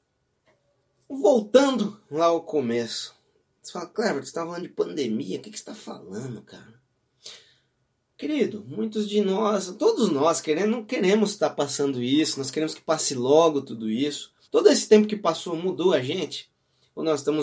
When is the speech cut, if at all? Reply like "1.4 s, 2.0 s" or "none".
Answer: 14.4 s